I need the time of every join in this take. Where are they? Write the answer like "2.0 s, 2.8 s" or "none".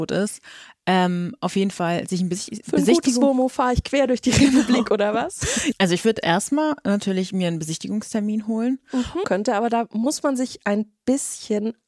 5.7 s, 9.2 s